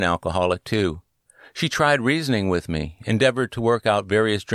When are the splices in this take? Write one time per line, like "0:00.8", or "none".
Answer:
none